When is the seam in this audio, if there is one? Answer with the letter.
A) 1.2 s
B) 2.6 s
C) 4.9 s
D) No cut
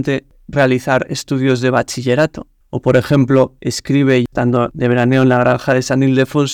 B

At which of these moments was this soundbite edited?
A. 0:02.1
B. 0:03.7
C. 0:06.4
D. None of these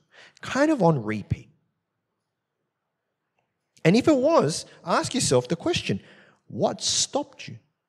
D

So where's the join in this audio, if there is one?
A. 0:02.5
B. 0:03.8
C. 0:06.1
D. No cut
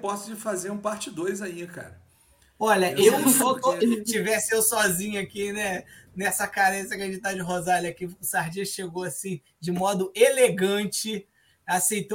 B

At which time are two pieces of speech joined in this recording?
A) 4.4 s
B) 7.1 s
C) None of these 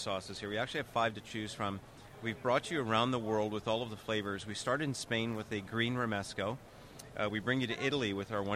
C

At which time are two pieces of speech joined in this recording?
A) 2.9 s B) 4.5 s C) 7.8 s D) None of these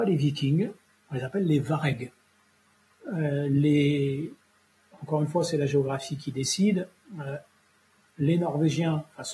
A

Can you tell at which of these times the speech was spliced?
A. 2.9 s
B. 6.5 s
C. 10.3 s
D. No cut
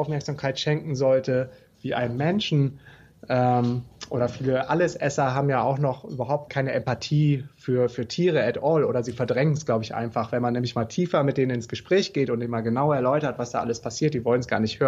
B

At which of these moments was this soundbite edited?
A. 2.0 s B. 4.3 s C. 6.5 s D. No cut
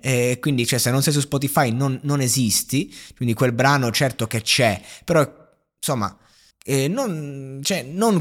C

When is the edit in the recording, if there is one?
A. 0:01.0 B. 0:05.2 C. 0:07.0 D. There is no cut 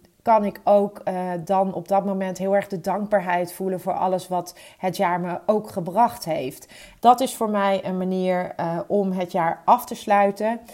C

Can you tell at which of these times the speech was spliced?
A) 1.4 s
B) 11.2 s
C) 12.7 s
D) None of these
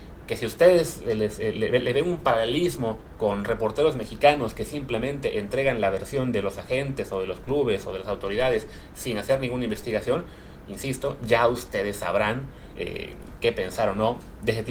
D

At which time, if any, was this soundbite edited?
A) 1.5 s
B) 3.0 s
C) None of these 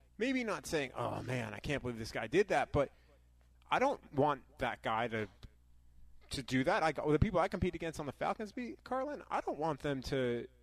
C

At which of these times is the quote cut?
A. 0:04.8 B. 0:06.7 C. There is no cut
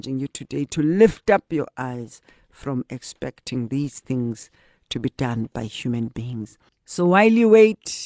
B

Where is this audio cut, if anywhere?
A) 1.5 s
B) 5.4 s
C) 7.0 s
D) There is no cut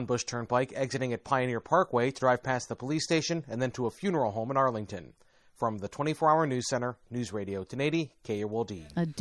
C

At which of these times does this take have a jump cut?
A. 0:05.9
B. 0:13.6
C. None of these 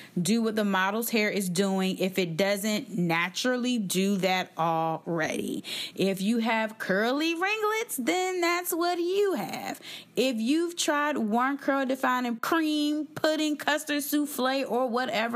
A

